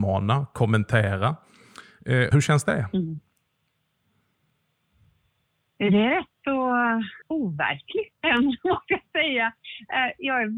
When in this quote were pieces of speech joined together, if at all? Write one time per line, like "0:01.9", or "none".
0:02.3
0:07.2